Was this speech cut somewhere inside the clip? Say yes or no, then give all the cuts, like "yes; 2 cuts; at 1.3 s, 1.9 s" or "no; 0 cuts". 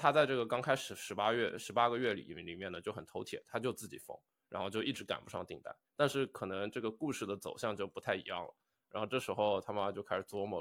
yes; 2 cuts; at 5.8 s, 8.9 s